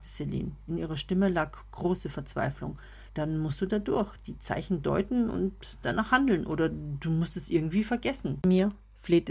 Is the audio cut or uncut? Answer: cut